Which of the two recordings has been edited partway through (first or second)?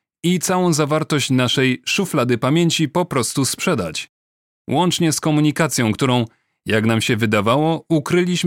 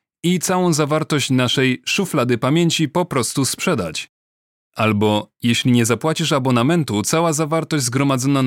second